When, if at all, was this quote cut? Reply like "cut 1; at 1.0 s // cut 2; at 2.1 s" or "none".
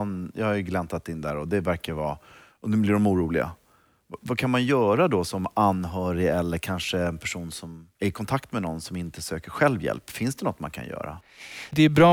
cut 1; at 7.9 s

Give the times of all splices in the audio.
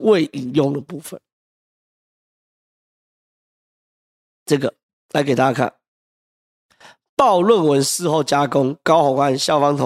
none

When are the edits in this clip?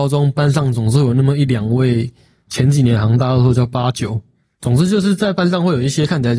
cut 1; at 2.5 s // cut 2; at 4.6 s

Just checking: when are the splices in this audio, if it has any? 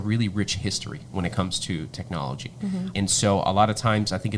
cut 1; at 2.9 s

